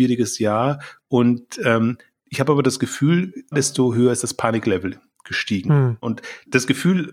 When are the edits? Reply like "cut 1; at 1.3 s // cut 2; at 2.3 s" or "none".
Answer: cut 1; at 3.5 s // cut 2; at 6.0 s